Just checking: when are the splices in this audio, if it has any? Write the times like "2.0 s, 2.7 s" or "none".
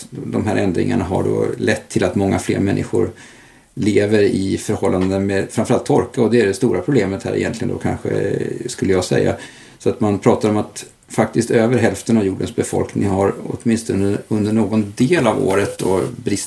none